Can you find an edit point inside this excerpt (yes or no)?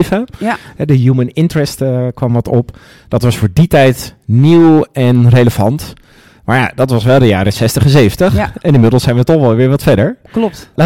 no